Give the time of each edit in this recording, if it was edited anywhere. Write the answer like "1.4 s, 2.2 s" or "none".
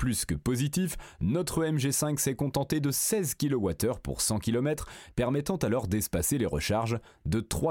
none